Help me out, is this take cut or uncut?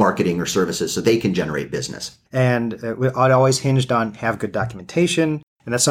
cut